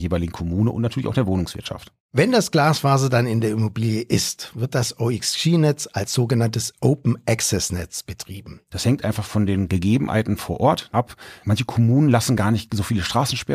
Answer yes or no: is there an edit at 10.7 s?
no